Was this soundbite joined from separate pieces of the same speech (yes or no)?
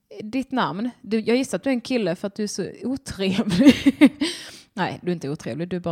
no